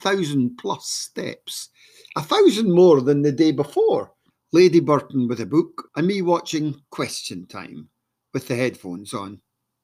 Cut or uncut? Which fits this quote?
cut